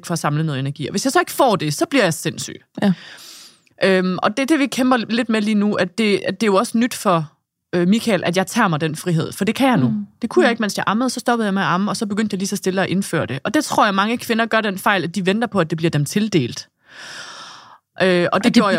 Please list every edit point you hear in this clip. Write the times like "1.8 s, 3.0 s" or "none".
none